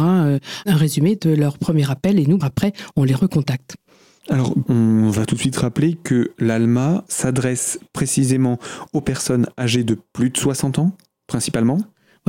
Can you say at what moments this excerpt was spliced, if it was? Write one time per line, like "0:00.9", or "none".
0:02.4
0:04.7
0:07.1